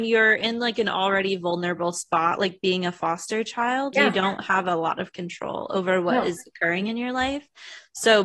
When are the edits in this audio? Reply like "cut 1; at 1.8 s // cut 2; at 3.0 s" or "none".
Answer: cut 1; at 3.9 s